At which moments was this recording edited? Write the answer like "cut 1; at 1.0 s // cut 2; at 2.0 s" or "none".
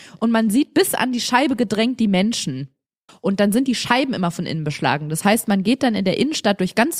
cut 1; at 3.1 s